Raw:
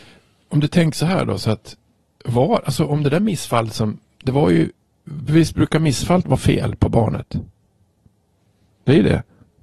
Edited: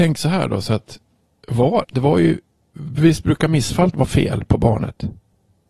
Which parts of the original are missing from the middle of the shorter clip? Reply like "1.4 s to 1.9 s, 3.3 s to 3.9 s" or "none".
2.6 s to 4.2 s